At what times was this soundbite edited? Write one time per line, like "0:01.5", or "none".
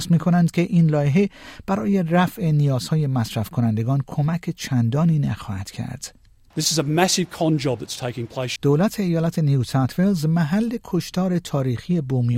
0:08.6